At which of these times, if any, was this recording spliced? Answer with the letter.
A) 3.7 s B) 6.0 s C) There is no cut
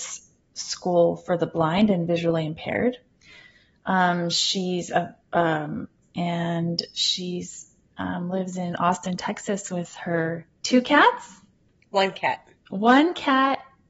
B